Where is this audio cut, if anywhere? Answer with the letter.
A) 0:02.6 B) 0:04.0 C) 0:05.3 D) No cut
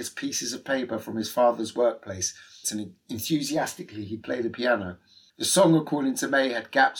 A